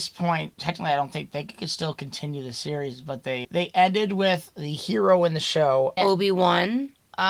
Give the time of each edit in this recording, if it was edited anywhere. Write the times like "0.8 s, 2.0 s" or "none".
3.4 s, 6.0 s